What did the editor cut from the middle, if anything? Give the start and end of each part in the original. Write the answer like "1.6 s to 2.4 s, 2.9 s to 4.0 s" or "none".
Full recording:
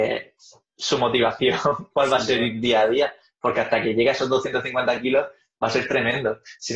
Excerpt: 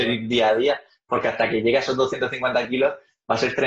none